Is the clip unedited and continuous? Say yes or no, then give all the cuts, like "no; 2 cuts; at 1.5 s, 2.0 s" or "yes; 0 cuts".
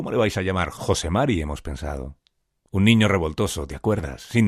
yes; 0 cuts